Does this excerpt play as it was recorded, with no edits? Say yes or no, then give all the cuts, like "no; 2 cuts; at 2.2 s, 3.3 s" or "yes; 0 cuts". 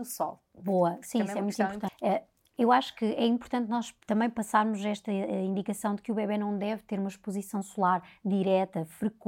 no; 2 cuts; at 1.9 s, 4.0 s